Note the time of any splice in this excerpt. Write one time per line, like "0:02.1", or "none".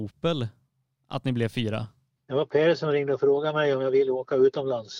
0:02.2